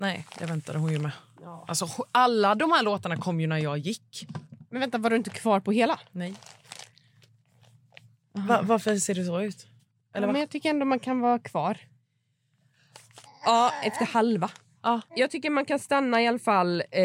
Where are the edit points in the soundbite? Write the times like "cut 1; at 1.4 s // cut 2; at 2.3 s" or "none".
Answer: cut 1; at 13.2 s // cut 2; at 15.1 s